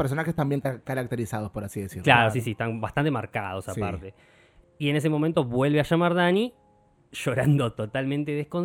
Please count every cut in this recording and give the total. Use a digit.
1